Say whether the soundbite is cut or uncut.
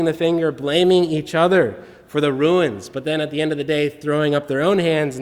uncut